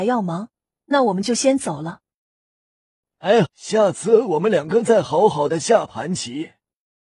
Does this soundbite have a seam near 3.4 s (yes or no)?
yes